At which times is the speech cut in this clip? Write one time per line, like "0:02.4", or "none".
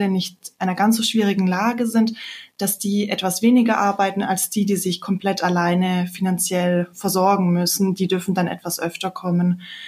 none